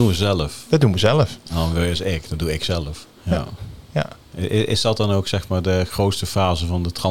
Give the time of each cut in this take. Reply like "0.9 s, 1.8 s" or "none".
3.1 s